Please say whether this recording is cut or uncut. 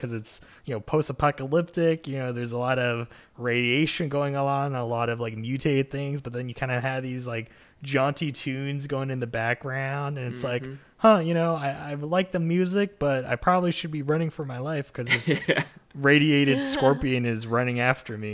uncut